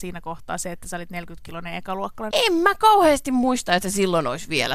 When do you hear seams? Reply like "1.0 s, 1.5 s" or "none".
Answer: 2.3 s

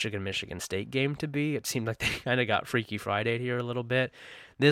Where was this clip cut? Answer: none

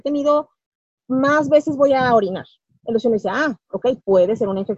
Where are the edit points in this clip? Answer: none

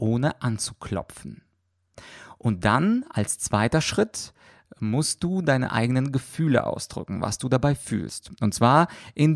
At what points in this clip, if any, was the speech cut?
none

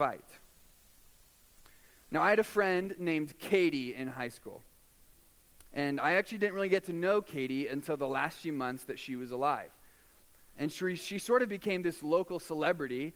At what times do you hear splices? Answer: 10.5 s

